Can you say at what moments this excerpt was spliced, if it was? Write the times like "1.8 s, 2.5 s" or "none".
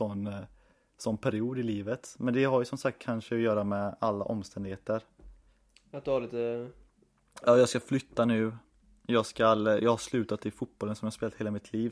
none